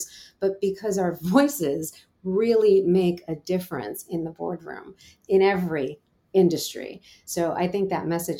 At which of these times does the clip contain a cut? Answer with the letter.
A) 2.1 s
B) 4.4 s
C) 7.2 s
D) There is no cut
D